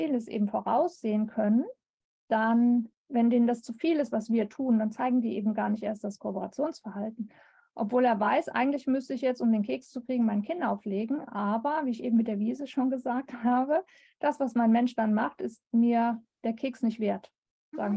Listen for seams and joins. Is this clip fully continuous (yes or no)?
yes